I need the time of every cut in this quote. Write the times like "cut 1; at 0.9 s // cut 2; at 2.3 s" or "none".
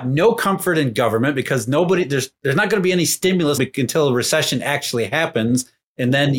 cut 1; at 3.6 s